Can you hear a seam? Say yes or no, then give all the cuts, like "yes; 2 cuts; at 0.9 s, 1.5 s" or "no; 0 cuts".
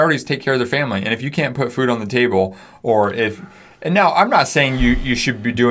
no; 0 cuts